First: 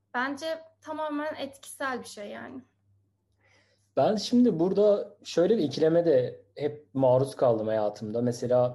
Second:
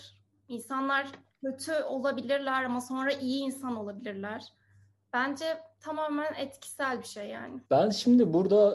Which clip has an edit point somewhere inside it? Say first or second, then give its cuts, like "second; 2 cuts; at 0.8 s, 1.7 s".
second; 1 cut; at 7.6 s